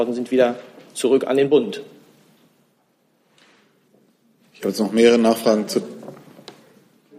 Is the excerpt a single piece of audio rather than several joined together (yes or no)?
yes